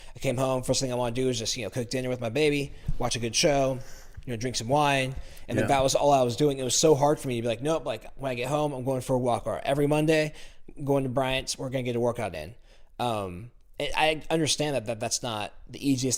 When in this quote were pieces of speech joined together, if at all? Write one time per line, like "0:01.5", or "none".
none